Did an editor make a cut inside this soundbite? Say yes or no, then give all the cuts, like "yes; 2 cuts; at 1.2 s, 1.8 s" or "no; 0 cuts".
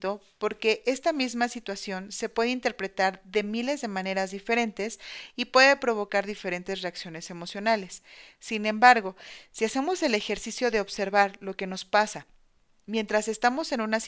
no; 0 cuts